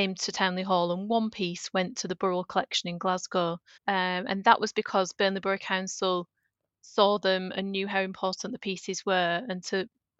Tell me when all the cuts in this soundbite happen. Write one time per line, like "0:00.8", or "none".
0:03.8

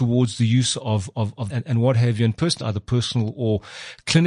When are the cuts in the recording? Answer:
0:01.5
0:02.6

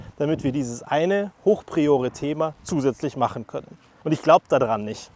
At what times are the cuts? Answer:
0:04.0

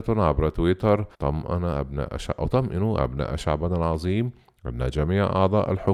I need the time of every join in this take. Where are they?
0:01.1

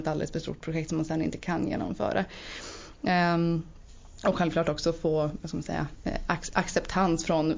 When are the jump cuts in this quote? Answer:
none

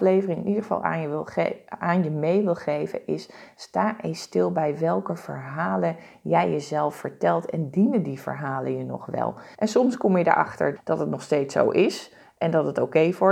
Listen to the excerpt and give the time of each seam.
0:09.5
0:10.8

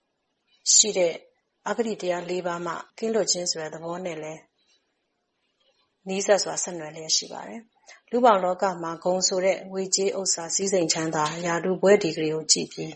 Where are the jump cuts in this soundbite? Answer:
0:02.9

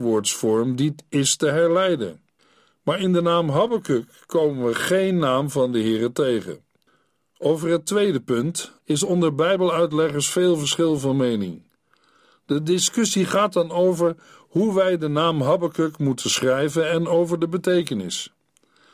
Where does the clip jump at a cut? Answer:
0:08.8

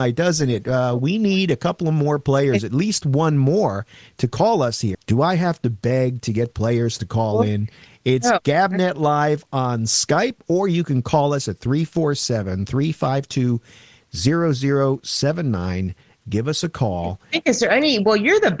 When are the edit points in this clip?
0:04.9

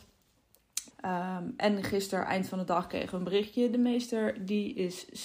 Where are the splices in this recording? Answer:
0:00.9

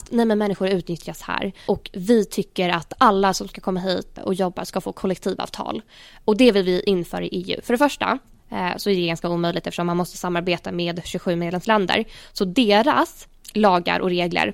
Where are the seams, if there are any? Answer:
0:04.2

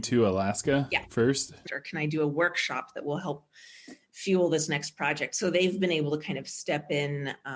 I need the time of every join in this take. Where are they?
0:01.7

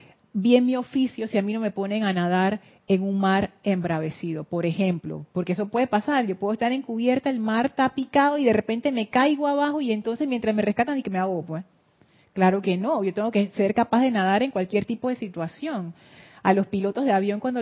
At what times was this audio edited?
none

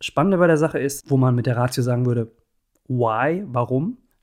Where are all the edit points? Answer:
0:01.0

